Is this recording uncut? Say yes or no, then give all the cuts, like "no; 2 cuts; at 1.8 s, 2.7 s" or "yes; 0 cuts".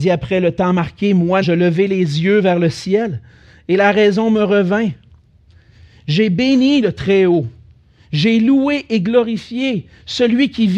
no; 1 cut; at 1.4 s